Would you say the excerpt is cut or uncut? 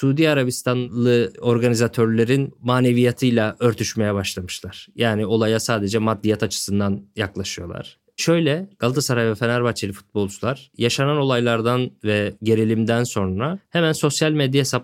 uncut